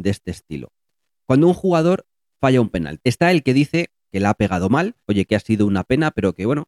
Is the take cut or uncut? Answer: cut